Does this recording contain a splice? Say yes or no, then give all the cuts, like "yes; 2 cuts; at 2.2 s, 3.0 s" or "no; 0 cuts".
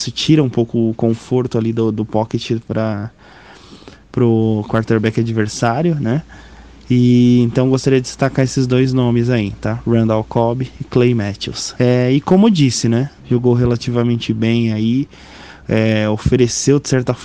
yes; 2 cuts; at 11.7 s, 13.2 s